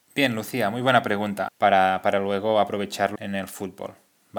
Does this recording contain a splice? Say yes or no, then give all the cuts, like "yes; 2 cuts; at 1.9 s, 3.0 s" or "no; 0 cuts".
yes; 2 cuts; at 1.5 s, 3.2 s